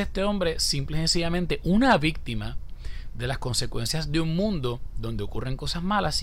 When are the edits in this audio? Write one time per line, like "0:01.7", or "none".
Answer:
none